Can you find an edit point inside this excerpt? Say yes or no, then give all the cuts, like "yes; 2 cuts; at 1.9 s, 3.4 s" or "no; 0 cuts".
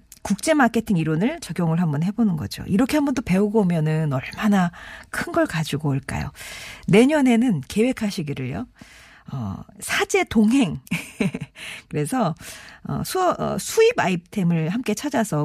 no; 0 cuts